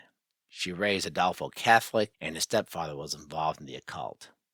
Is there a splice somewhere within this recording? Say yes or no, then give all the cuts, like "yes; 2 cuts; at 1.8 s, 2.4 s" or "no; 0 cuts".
yes; 1 cut; at 2.1 s